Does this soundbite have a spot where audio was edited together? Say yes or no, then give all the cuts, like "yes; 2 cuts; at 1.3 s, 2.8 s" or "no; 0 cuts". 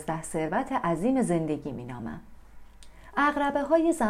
yes; 1 cut; at 3.1 s